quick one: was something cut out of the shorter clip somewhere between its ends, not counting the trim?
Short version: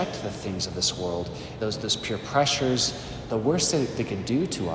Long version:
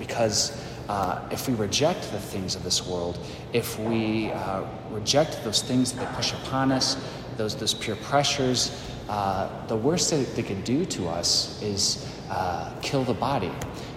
yes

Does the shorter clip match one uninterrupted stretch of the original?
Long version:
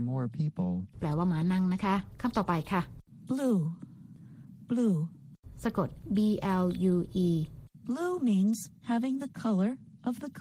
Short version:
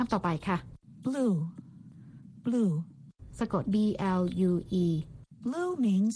no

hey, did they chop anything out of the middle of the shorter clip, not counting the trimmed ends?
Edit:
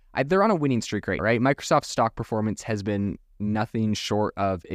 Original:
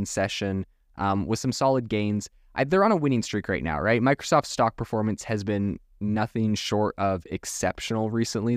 yes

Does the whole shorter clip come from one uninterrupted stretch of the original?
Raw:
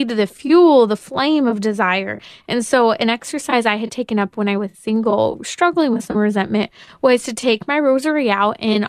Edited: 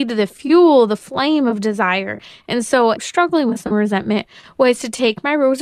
no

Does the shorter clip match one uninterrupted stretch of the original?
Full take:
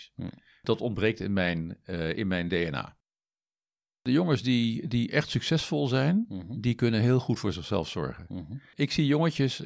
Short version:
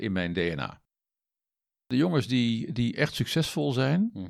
yes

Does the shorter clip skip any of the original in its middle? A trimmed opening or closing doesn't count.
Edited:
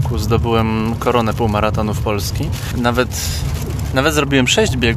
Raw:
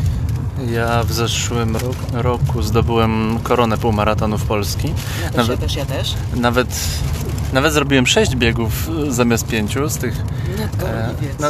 yes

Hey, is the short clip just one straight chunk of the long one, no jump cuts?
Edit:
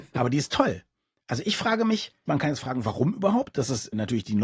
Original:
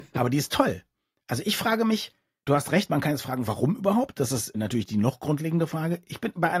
no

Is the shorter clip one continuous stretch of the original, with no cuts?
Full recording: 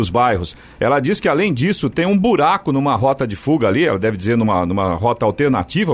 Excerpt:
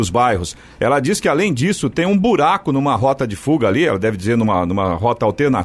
yes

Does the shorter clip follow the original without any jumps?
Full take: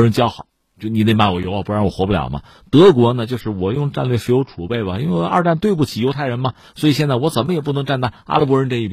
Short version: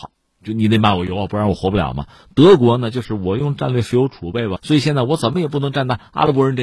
no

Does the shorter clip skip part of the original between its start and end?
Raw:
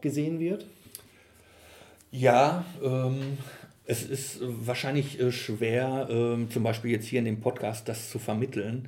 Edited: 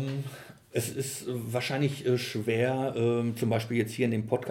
no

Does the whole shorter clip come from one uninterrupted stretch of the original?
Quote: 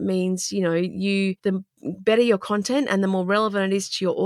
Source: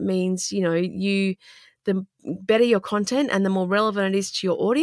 no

